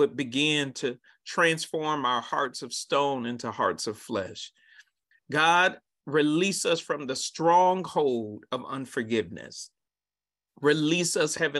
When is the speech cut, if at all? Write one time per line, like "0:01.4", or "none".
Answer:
0:05.1

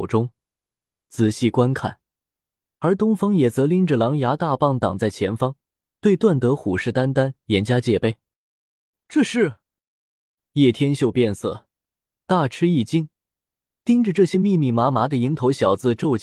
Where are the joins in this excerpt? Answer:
none

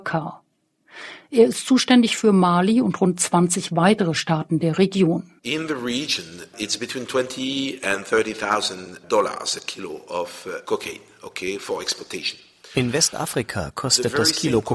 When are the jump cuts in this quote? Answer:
0:05.4

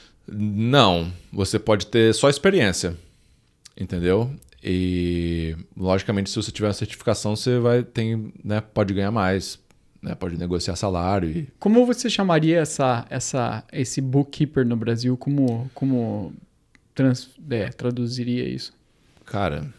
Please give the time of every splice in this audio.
none

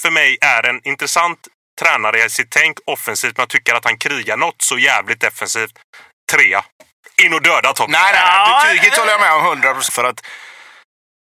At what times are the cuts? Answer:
0:09.9

